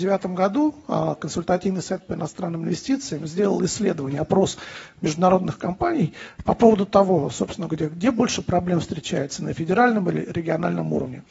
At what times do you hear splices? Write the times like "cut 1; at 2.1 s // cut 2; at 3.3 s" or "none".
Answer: none